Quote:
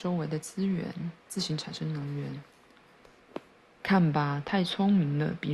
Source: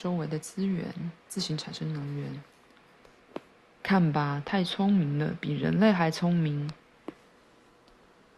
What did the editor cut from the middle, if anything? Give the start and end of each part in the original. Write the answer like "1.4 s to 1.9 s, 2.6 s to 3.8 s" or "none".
none